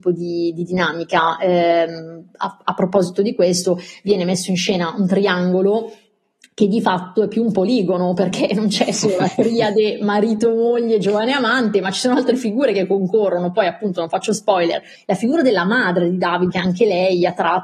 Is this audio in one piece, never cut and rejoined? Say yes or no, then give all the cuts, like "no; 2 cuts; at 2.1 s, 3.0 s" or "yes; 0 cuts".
no; 2 cuts; at 14.9 s, 16.5 s